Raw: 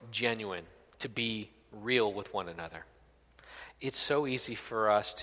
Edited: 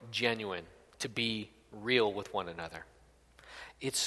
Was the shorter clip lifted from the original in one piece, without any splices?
yes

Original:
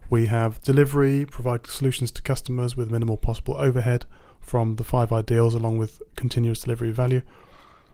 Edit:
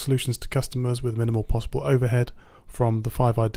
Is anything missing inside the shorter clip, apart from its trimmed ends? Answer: no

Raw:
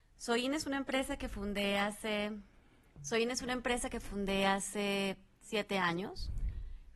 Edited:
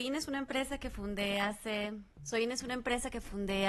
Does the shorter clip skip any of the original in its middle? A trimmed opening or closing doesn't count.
yes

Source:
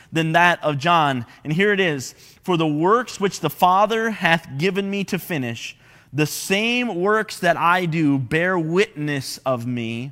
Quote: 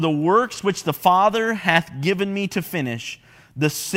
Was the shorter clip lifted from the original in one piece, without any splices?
yes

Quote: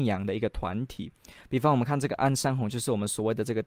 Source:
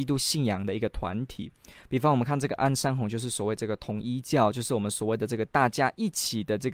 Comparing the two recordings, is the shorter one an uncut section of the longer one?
no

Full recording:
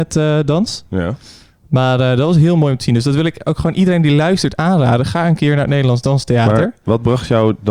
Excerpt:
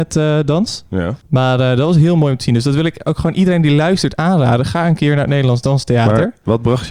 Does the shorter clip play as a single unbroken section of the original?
no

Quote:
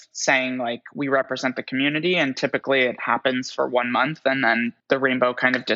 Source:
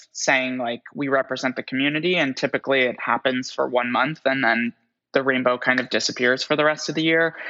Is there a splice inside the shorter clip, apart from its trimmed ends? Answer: yes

